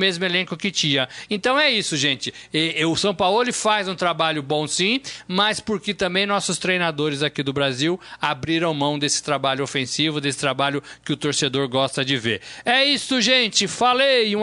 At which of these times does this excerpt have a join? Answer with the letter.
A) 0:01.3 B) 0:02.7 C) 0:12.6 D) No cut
D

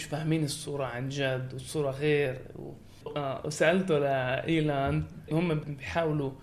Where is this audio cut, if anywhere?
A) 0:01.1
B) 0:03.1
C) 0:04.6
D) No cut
B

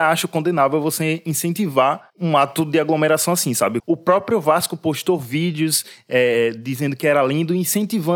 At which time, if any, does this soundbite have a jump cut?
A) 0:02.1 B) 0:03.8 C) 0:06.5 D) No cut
B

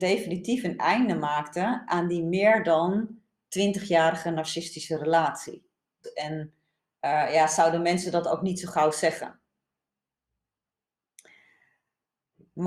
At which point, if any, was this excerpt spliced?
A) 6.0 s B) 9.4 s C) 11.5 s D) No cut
A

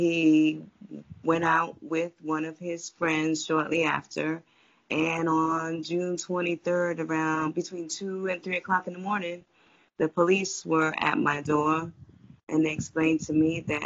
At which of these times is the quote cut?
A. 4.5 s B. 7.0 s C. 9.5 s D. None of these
D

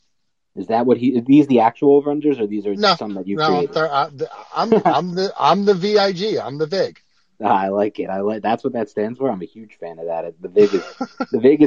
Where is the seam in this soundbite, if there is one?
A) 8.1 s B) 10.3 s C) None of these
C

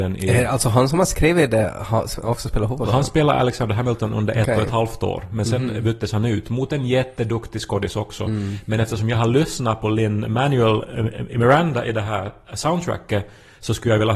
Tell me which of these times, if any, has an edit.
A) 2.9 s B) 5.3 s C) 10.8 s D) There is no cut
D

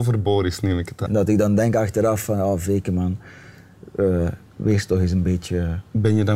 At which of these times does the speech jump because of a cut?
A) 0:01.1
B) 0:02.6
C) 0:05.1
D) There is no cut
A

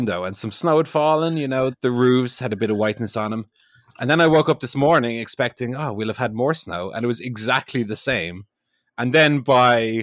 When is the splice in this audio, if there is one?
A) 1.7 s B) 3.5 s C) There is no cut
A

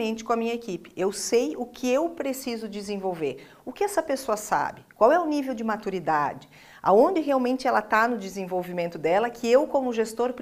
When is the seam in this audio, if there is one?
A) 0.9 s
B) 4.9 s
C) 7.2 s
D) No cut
D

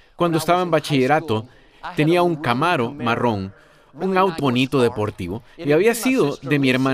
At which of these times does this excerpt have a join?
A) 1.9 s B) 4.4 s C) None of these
B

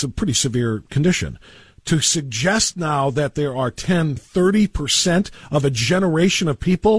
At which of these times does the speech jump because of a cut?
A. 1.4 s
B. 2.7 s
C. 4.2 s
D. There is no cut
C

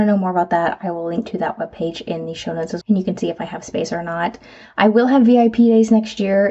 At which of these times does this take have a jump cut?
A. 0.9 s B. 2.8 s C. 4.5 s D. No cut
B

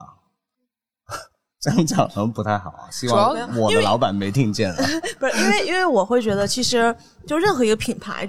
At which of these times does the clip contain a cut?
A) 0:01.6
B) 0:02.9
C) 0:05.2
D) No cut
D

